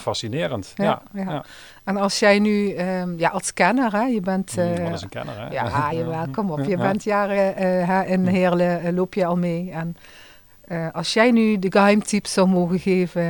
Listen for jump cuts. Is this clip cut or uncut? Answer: uncut